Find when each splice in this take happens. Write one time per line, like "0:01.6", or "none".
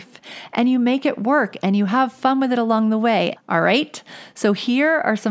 0:03.4